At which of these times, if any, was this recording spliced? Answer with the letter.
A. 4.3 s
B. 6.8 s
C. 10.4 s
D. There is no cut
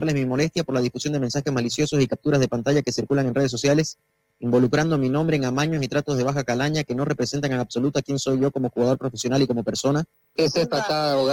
C